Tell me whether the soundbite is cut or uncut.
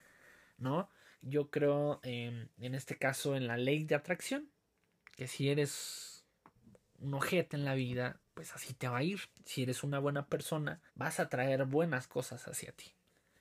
cut